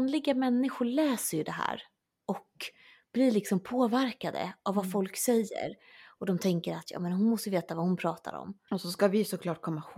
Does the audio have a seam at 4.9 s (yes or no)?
no